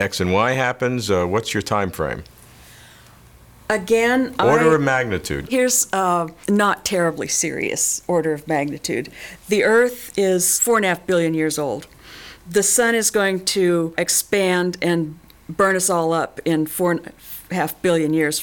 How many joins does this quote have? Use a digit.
1